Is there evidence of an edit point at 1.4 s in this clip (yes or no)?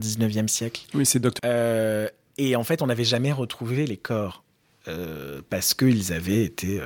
yes